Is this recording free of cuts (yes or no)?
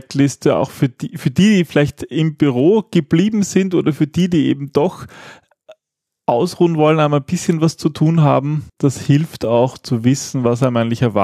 no